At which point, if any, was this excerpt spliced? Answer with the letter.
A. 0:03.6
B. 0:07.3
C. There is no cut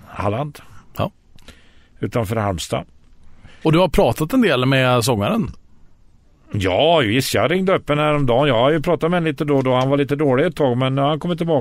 A